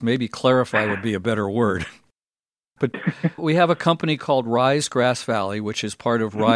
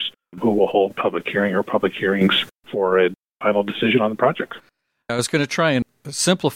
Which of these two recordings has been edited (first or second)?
first